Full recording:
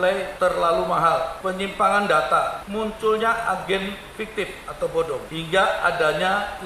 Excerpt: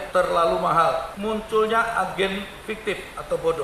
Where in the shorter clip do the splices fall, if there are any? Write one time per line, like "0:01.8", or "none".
0:01.1